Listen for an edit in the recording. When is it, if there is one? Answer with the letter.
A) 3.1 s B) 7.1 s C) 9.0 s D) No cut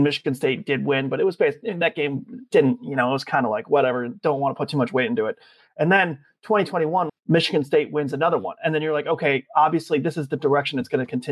B